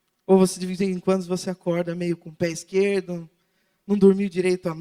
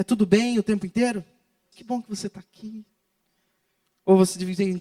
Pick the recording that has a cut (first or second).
second